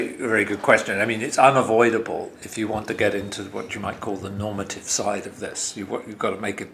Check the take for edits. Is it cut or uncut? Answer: uncut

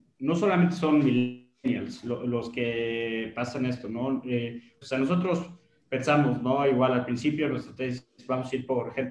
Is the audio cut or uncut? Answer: cut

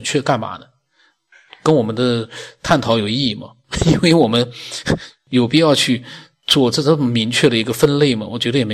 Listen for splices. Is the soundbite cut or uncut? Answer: uncut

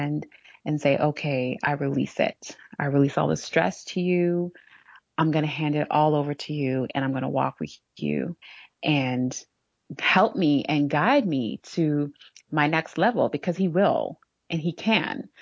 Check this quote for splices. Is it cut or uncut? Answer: cut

